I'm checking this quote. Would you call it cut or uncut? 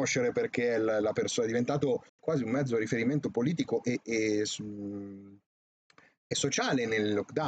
cut